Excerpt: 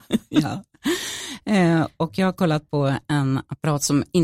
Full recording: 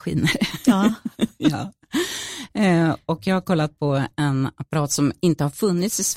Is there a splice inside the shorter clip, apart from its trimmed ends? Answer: no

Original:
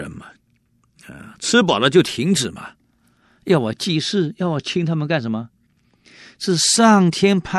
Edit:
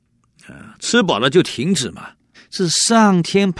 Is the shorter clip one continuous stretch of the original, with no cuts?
no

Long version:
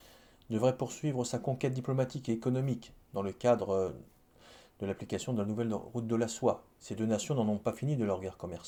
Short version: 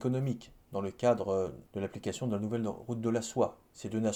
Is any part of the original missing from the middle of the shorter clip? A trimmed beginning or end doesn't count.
yes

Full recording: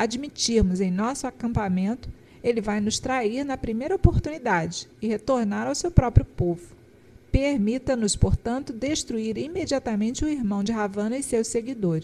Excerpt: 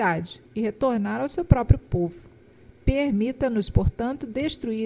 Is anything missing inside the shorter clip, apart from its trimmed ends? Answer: no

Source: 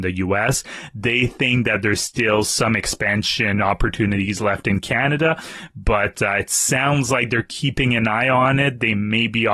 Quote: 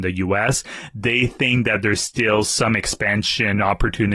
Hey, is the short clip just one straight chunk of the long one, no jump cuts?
yes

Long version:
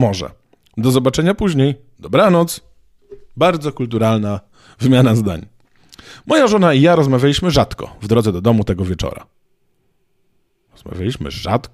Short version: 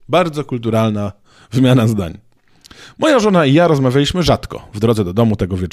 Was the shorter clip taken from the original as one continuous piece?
yes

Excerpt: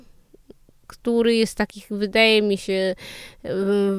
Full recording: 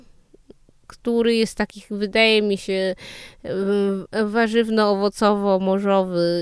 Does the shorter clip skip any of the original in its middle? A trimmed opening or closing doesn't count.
no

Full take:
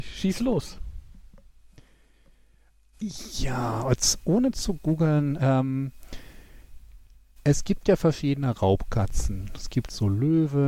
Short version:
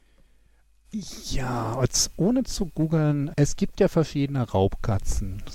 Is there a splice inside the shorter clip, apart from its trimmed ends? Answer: yes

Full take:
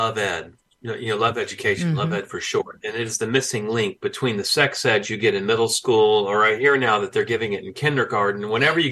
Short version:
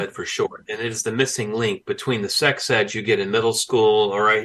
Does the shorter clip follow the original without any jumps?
yes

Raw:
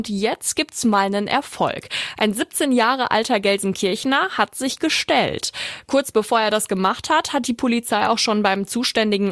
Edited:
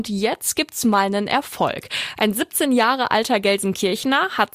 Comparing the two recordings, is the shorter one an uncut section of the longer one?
yes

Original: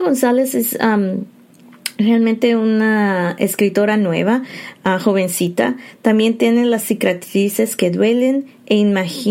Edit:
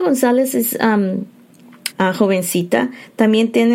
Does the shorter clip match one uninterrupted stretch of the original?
no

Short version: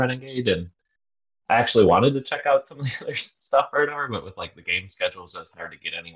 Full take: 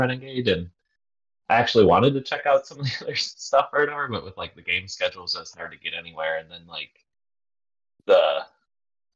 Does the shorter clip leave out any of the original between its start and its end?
no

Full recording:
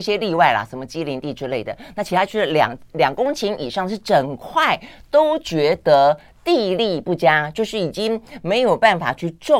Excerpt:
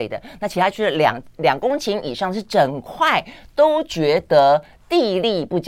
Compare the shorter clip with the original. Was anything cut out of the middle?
no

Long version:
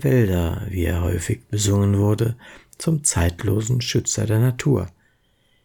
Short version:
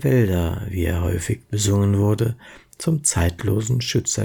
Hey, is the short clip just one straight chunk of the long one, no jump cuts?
yes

